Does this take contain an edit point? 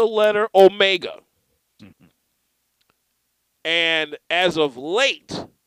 yes; 1 cut; at 1.8 s

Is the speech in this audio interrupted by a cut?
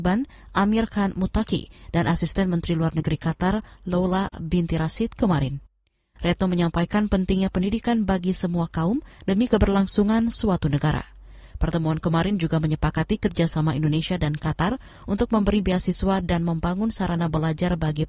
no; 0 cuts

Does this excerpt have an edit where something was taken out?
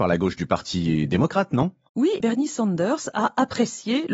yes; 1 cut; at 2.2 s

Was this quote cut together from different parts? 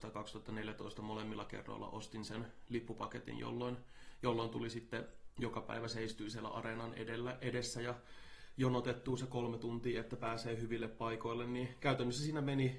no; 0 cuts

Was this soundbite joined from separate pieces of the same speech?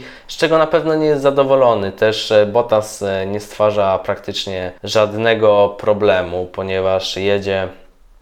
yes; 1 cut; at 4.8 s

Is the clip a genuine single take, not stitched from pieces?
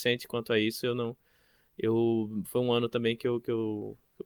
yes; 0 cuts

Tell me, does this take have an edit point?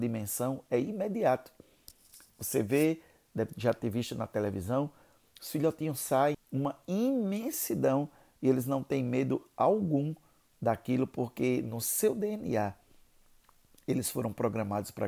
yes; 1 cut; at 6.3 s

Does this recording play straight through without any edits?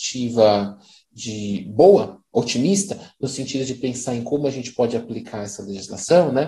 yes; 0 cuts

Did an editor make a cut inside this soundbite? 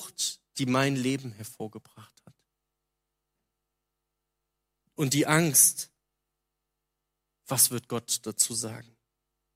no; 0 cuts

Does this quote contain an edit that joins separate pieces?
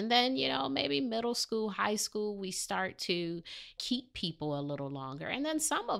no; 0 cuts

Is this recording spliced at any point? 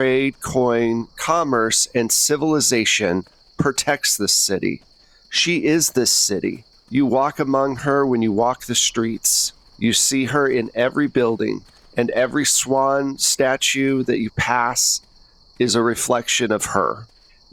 no; 0 cuts

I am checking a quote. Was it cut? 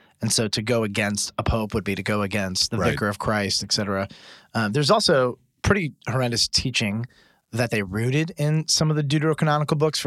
no; 0 cuts

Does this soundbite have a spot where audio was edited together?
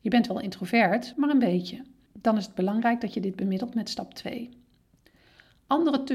yes; 1 cut; at 1.1 s

